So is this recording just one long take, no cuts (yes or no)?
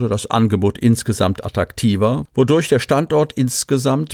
yes